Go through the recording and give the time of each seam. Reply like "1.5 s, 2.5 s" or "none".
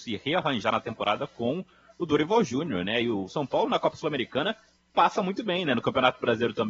none